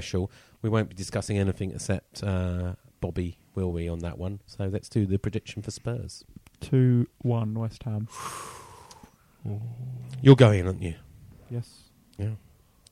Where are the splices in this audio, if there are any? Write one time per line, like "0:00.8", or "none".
none